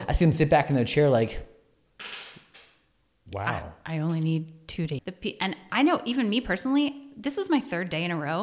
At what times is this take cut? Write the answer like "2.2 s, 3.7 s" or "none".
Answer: 5.0 s